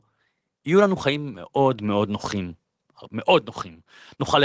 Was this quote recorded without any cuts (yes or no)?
yes